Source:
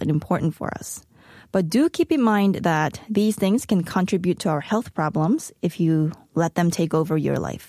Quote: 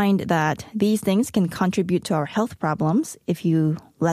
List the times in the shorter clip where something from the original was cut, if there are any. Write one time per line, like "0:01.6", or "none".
none